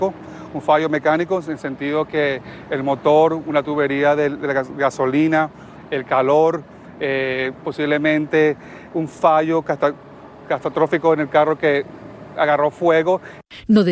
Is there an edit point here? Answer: no; 0 cuts

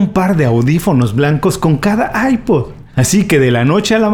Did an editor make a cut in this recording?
yes; 1 cut; at 2.9 s

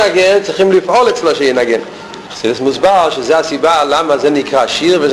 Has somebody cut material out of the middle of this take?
yes; 1 cut; at 2.3 s

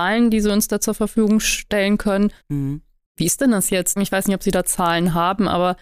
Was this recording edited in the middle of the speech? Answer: yes; 2 cuts; at 2.4 s, 4.0 s

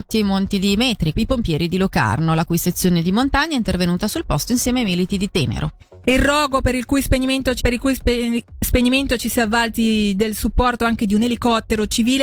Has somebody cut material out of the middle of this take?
yes; 2 cuts; at 1.1 s, 7.6 s

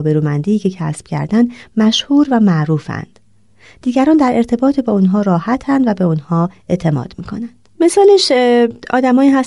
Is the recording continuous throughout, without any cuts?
no; 1 cut; at 7.7 s

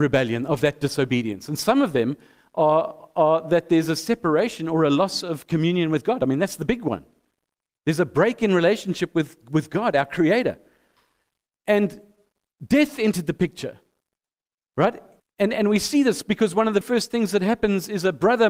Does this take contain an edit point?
yes; 2 cuts; at 15.2 s, 16.8 s

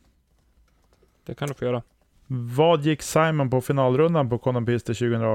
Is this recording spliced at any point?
yes; 1 cut; at 2.1 s

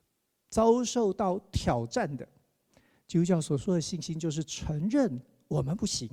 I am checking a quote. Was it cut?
yes; 1 cut; at 2.9 s

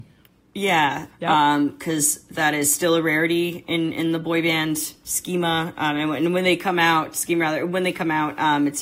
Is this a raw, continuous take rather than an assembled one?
no; 1 cut; at 1.1 s

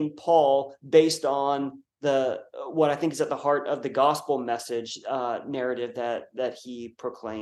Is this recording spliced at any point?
no; 0 cuts

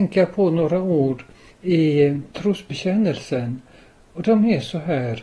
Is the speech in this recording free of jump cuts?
yes; 0 cuts

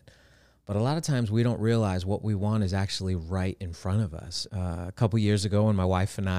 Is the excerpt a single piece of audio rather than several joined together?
no; 1 cut; at 4.5 s

